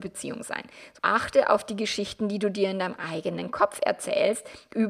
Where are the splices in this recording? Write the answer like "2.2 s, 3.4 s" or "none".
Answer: 1.0 s